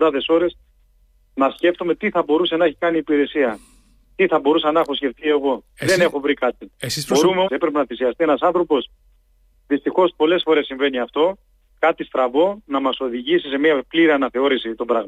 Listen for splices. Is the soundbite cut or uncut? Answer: cut